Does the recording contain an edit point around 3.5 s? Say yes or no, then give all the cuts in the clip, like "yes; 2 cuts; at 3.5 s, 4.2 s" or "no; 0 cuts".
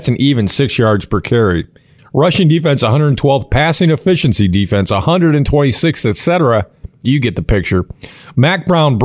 no; 1 cut; at 2.0 s